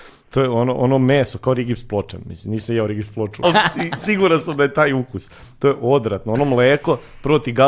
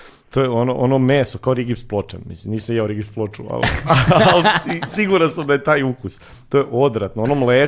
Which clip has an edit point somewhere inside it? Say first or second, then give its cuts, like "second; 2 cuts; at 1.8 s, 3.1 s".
first; 1 cut; at 3.4 s